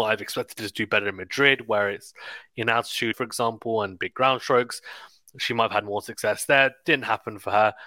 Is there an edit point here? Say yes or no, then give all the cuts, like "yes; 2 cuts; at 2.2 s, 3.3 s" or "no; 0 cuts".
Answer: yes; 1 cut; at 3.1 s